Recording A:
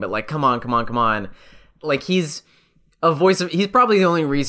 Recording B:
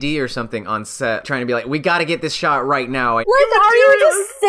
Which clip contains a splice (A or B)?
B